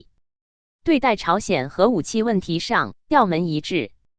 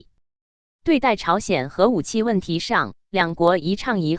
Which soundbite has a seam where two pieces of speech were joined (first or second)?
first